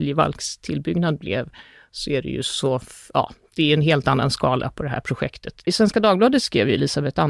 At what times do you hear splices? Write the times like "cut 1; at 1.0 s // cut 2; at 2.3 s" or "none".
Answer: cut 1; at 5.6 s